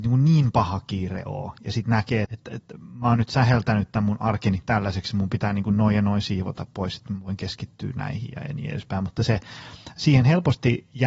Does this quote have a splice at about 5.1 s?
no; 1 cut; at 2.2 s

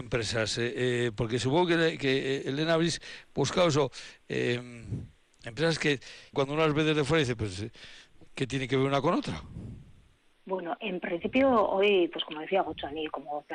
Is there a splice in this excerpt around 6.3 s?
yes; 1 cut; at 6.3 s

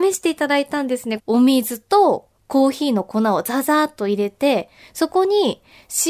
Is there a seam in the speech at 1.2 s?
yes; 1 cut; at 1.2 s

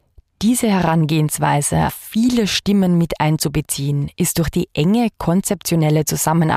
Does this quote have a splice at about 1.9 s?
yes; 1 cut; at 1.9 s

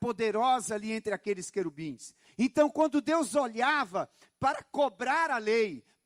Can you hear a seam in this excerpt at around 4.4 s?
no; 1 cut; at 2.2 s

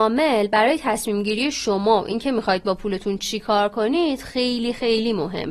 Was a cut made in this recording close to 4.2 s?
no; 0 cuts

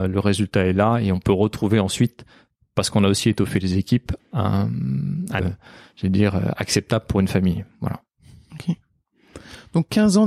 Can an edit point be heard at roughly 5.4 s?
yes; 2 cuts; at 4.2 s, 5.4 s

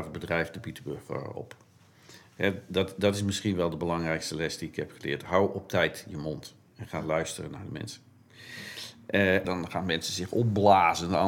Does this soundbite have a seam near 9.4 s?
yes; 1 cut; at 9.4 s

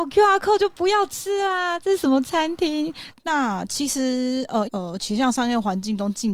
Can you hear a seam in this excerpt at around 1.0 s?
no; 2 cuts; at 3.1 s, 4.6 s

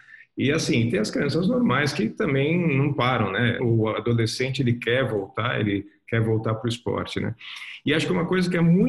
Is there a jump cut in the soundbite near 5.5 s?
no; 1 cut; at 3.6 s

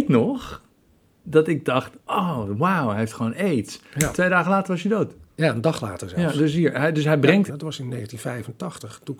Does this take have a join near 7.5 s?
yes; 1 cut; at 7.5 s

